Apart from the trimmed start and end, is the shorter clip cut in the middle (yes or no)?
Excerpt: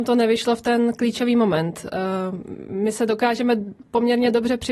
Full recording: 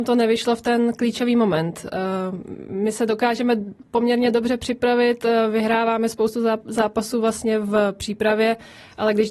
no